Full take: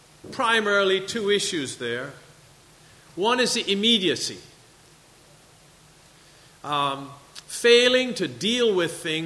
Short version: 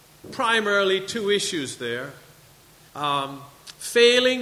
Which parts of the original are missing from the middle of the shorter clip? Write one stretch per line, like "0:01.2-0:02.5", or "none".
0:02.9-0:06.6